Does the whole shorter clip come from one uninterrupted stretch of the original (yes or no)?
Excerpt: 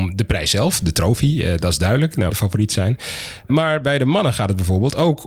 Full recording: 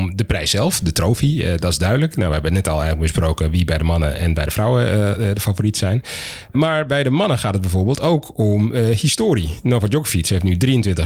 no